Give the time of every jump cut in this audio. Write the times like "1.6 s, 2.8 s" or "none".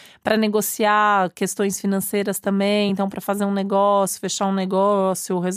none